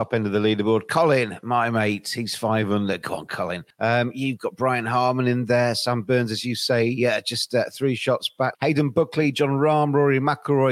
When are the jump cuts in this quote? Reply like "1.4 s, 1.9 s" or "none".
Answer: 3.7 s, 8.5 s